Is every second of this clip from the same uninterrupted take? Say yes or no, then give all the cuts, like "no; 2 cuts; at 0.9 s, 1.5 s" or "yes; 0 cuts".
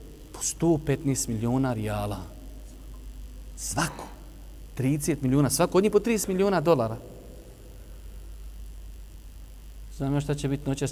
yes; 0 cuts